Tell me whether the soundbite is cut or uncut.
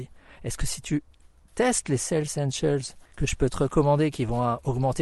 cut